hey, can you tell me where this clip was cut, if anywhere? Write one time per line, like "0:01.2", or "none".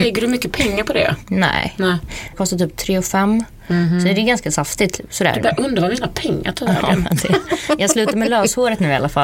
none